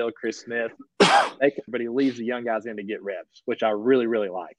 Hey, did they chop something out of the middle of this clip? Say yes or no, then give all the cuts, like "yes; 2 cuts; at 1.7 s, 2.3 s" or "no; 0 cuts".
yes; 1 cut; at 1.7 s